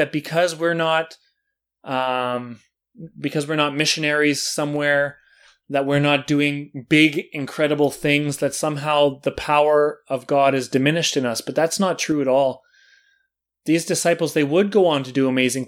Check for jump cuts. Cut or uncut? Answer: uncut